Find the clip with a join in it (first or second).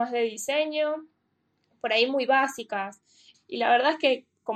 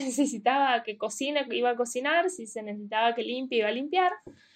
first